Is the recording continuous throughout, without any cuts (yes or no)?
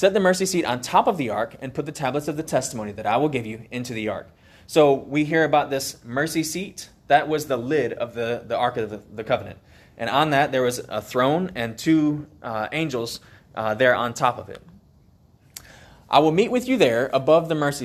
yes